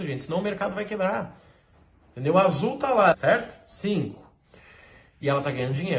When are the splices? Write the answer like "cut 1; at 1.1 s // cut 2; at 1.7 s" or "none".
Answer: cut 1; at 3.1 s